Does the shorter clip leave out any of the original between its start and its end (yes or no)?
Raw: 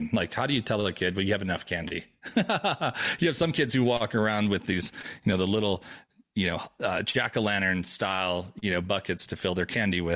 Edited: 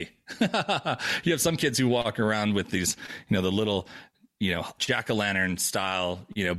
yes